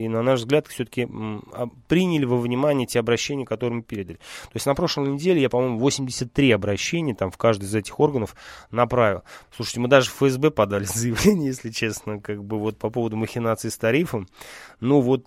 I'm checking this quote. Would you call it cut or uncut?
cut